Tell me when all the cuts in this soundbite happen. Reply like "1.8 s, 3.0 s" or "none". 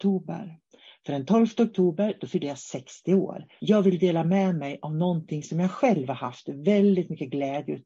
3.6 s